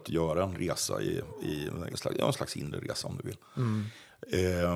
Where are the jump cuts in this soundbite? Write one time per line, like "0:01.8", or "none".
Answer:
0:01.9